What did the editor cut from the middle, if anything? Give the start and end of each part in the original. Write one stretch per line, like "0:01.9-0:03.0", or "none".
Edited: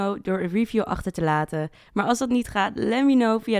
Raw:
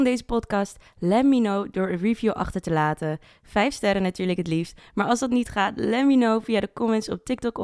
0:03.3-0:04.9

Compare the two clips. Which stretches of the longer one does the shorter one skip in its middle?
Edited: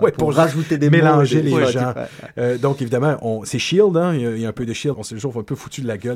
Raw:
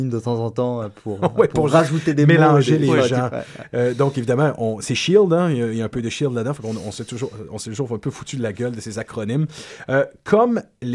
0:06.3-0:07.5

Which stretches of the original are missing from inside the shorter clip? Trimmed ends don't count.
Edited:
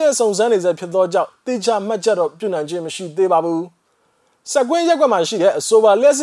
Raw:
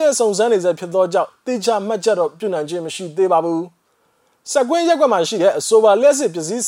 none

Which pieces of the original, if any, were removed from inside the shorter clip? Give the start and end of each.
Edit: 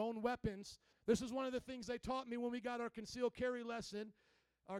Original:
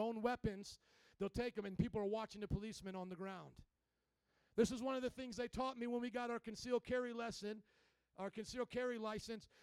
0:00.9-0:04.4

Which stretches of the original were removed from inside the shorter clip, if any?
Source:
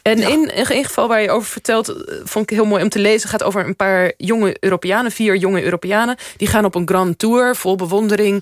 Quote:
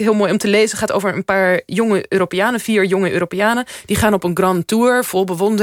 none

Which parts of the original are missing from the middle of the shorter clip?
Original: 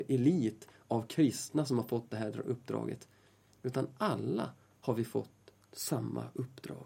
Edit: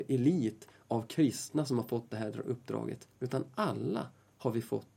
0:03.1-0:03.5

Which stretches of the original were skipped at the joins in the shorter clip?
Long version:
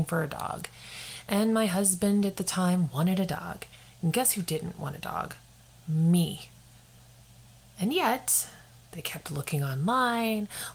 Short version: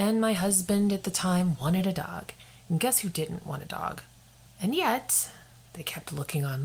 0:05.8-0:07.7

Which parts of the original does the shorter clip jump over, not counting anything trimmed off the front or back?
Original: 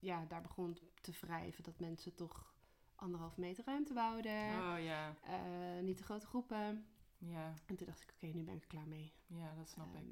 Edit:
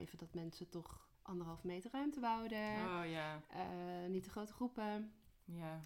0:02.6-0:02.9

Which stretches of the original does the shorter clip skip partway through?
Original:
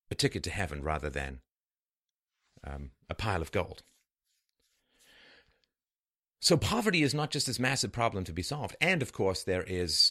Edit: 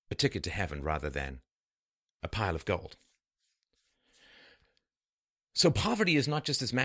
0:02.2-0:03.1

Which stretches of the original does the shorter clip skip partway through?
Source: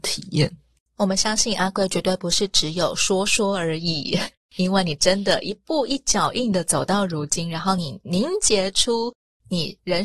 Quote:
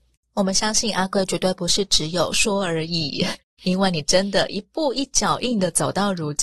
0:02.9-0:03.2

